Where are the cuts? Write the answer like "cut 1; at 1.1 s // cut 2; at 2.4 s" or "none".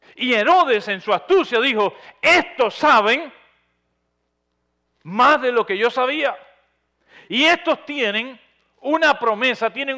none